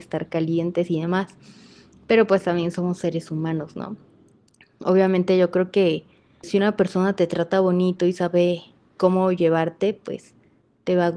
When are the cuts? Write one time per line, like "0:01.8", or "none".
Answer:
0:06.4